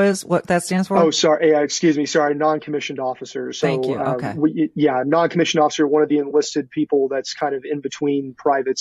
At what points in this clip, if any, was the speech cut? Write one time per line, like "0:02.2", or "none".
none